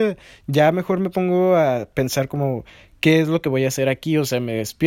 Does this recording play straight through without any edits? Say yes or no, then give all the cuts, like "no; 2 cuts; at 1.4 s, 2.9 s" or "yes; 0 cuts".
yes; 0 cuts